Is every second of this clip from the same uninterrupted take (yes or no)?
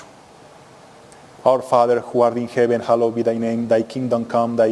no